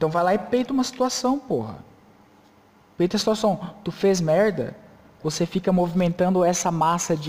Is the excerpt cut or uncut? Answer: cut